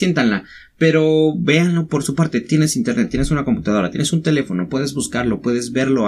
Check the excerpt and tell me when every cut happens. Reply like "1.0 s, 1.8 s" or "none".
none